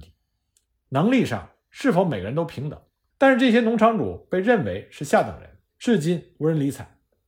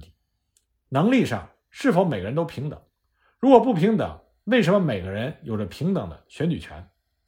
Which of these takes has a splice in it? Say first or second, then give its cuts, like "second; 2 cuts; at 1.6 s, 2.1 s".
first; 2 cuts; at 3.1 s, 5.7 s